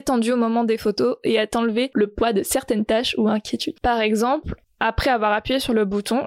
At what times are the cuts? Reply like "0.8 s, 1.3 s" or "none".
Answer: 3.8 s